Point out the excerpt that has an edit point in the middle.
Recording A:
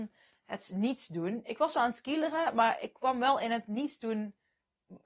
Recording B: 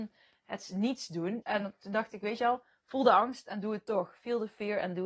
B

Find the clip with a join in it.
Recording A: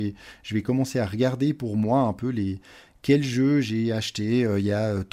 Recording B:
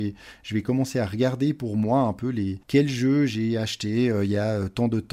B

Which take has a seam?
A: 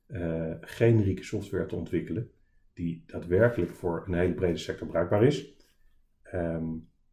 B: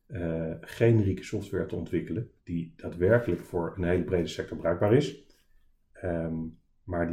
B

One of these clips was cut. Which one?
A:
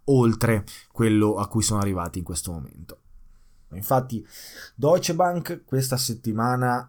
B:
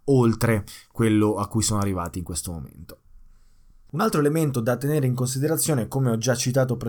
A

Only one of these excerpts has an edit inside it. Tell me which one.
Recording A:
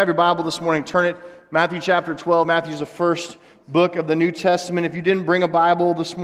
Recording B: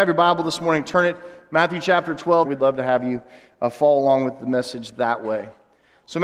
B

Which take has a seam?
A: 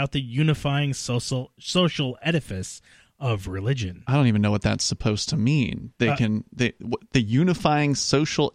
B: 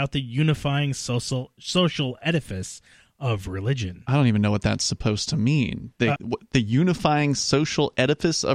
B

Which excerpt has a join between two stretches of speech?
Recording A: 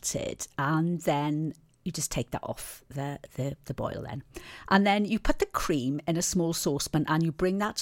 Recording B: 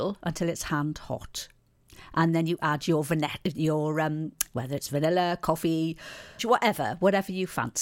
B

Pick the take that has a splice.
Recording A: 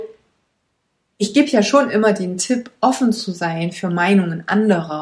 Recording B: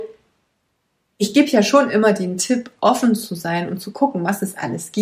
B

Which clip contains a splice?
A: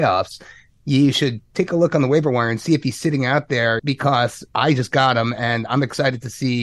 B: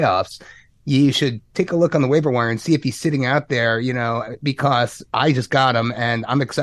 A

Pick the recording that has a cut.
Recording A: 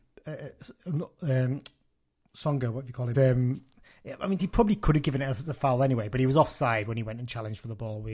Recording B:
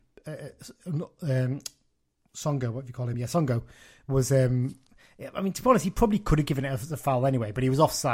A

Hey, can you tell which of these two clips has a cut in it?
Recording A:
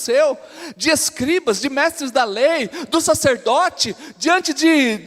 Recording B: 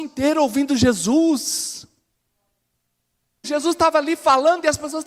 B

